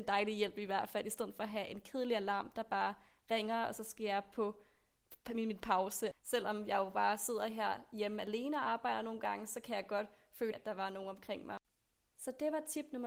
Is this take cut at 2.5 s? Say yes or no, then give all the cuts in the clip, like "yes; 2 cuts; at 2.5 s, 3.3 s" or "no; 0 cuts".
no; 2 cuts; at 6.1 s, 10.5 s